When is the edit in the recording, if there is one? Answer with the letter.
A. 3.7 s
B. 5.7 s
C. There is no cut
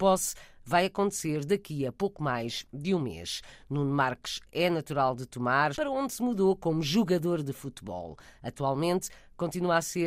B